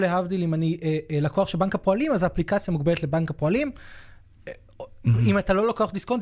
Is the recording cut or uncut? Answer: uncut